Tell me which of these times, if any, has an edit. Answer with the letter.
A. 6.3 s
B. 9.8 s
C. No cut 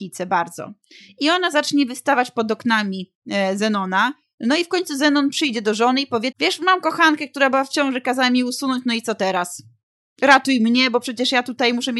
A